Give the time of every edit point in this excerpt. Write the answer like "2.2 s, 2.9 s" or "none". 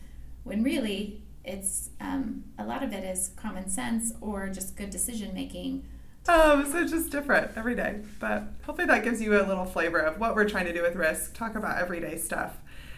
6.3 s

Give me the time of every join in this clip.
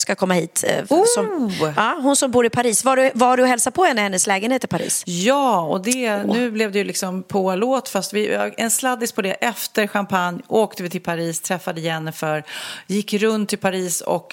none

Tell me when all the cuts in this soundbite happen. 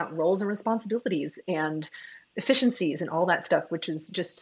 none

